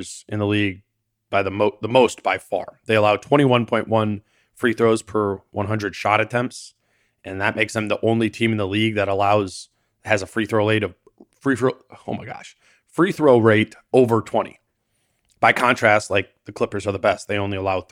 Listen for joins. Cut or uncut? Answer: uncut